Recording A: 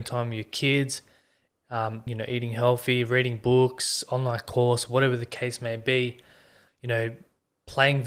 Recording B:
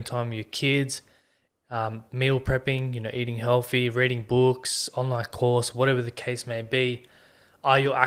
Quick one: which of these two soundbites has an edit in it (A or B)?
A